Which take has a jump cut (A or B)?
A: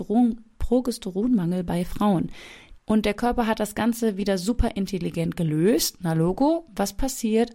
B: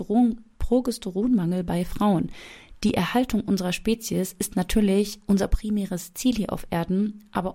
A